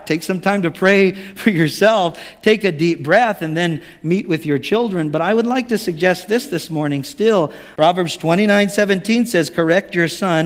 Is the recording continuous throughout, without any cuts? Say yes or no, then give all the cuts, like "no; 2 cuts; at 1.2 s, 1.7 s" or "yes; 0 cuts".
no; 1 cut; at 7.8 s